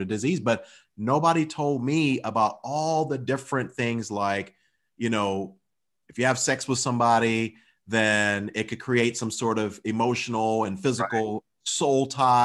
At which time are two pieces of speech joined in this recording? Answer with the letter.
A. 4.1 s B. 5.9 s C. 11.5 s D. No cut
D